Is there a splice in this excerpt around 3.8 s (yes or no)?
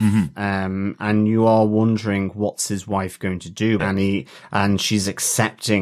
yes